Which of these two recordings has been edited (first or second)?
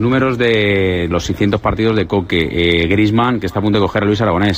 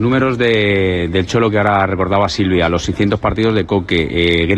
first